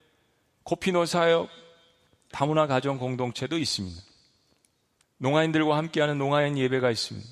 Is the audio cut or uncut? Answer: cut